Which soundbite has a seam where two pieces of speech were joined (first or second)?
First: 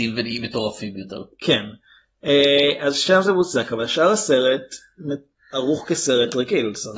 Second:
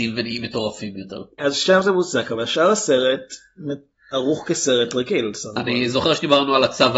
second